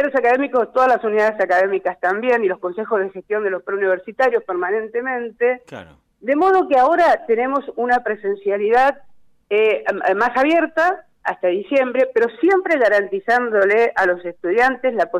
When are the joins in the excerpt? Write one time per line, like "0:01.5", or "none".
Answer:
none